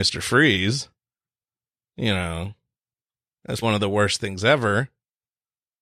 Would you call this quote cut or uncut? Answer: cut